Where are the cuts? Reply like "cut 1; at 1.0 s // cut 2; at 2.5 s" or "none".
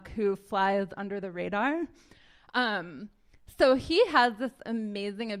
none